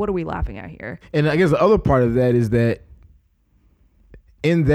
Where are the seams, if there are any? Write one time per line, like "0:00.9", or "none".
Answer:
0:01.0